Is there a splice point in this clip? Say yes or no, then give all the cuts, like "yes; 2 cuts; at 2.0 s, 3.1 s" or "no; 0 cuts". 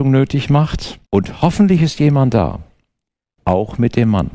yes; 2 cuts; at 1.1 s, 3.4 s